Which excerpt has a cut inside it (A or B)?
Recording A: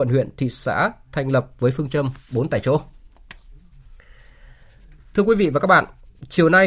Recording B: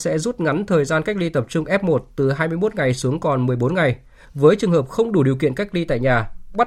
B